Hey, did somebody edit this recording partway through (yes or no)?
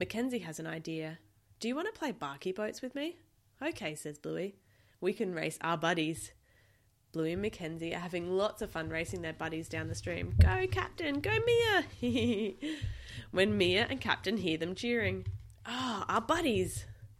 no